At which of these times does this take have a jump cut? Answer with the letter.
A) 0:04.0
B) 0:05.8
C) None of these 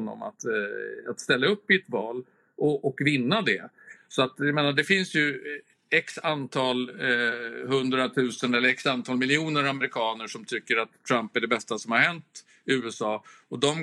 A